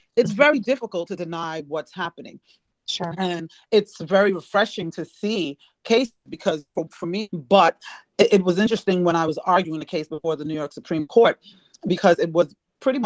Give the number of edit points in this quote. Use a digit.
1